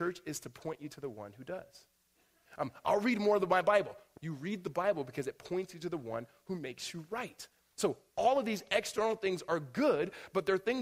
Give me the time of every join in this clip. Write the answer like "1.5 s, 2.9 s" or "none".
4.2 s